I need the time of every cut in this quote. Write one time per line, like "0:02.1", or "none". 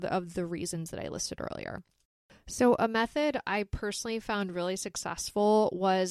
none